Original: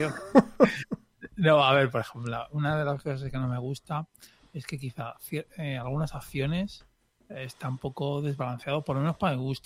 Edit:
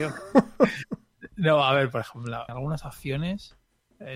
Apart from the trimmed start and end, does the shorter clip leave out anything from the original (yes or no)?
yes